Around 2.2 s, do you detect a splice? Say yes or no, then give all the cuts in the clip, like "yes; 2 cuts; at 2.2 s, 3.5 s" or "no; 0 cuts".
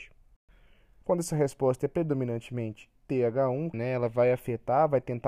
no; 2 cuts; at 1.0 s, 3.7 s